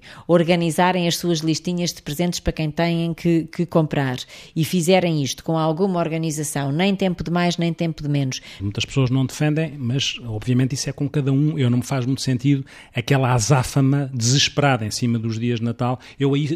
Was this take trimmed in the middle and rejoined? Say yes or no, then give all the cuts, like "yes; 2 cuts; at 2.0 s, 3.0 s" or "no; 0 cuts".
yes; 1 cut; at 8.6 s